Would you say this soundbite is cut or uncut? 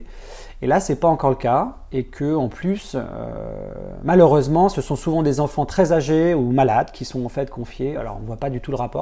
uncut